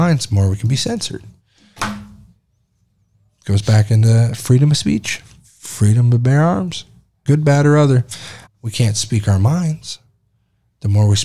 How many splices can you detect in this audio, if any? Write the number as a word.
two